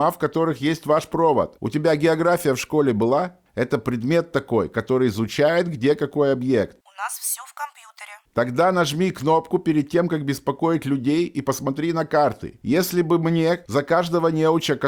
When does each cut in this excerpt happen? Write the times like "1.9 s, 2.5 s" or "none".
none